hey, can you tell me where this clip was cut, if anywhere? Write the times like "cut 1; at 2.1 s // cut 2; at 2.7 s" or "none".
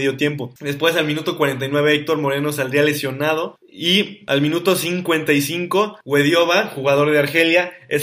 cut 1; at 3.6 s